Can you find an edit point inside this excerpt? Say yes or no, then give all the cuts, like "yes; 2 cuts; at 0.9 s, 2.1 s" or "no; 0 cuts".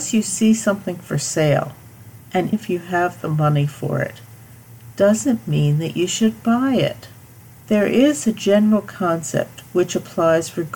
yes; 2 cuts; at 2.5 s, 7.6 s